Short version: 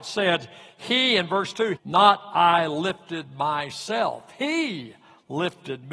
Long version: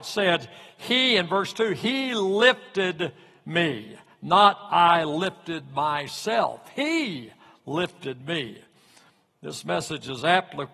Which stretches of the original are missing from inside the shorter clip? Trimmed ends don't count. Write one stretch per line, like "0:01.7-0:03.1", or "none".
0:01.7-0:04.1